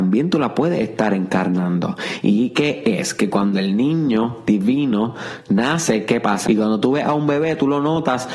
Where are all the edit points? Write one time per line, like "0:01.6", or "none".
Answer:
0:06.4